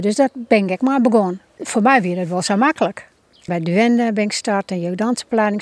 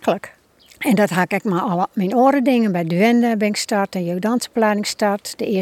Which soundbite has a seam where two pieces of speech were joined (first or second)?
first